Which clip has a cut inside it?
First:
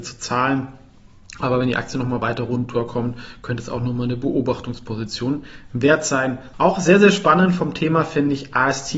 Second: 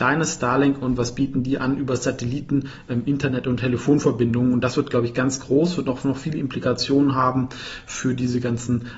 first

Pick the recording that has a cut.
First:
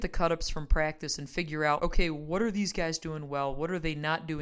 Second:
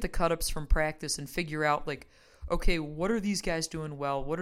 first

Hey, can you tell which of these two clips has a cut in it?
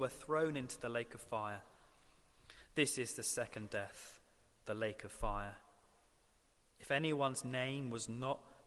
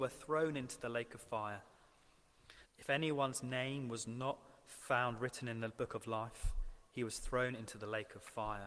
second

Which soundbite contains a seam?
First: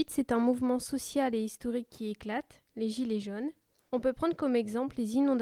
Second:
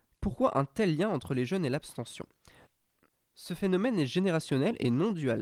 first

